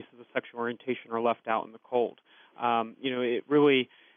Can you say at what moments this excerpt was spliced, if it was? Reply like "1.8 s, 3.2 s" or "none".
none